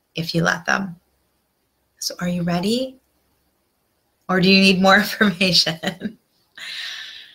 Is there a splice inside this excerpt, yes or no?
no